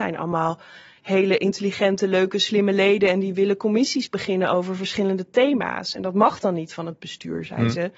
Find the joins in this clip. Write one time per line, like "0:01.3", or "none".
none